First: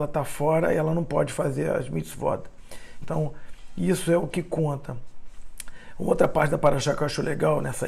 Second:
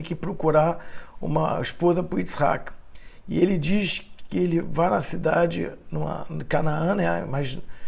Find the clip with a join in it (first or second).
first